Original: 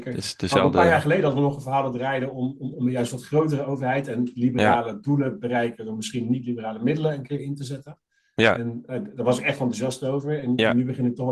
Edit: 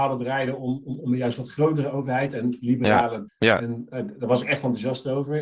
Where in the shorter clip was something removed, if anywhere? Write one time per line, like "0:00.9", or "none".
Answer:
0:03.3